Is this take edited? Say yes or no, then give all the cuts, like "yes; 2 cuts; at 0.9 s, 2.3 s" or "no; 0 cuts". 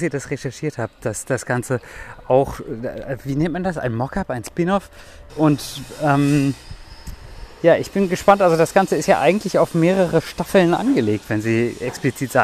yes; 1 cut; at 5.3 s